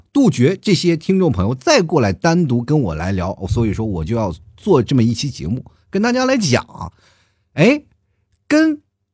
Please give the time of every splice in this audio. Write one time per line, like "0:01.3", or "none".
none